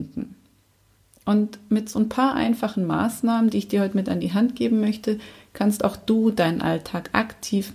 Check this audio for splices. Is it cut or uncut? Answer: uncut